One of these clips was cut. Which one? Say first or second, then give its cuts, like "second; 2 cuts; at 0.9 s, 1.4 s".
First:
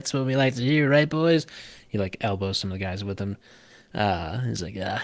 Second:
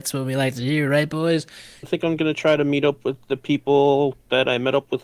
second; 1 cut; at 1.8 s